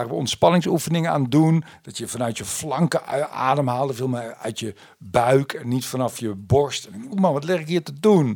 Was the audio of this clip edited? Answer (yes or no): yes